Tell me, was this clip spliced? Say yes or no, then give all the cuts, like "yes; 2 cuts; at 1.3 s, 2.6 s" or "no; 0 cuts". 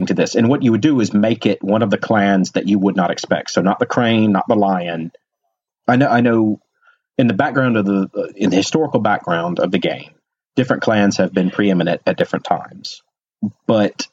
yes; 1 cut; at 5.7 s